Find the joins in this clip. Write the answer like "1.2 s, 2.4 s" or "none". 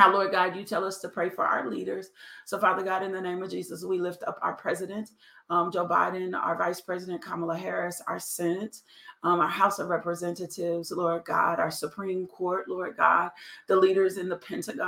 none